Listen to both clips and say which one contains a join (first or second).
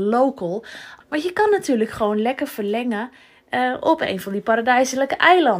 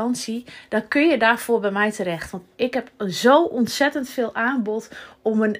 first